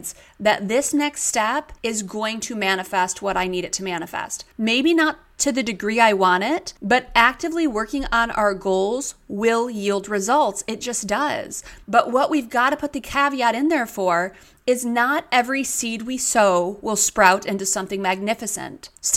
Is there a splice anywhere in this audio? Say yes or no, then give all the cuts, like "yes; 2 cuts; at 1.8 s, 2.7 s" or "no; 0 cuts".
yes; 1 cut; at 11.8 s